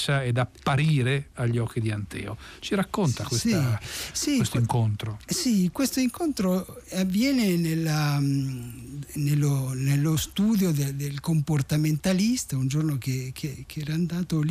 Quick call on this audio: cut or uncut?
uncut